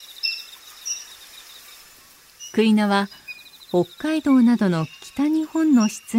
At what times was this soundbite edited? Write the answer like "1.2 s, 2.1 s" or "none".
none